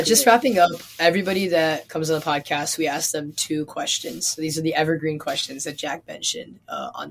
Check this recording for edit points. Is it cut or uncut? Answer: uncut